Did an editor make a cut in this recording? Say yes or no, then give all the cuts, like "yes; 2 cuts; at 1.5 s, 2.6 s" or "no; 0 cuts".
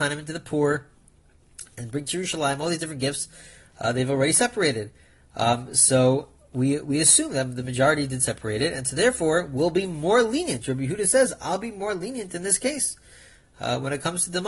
no; 0 cuts